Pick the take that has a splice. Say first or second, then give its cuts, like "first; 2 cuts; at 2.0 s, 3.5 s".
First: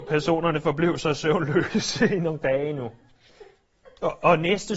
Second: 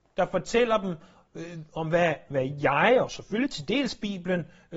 second; 1 cut; at 3.0 s